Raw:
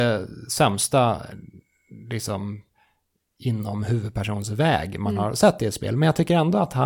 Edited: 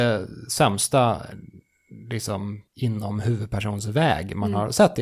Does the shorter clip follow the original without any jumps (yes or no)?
no